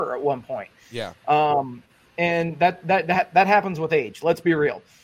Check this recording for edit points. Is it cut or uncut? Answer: uncut